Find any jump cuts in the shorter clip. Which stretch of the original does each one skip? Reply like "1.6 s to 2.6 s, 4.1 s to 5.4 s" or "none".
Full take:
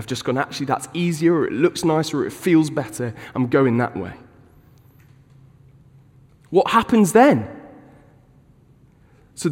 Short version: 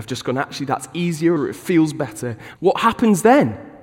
1.4 s to 2.1 s, 3.3 s to 6.5 s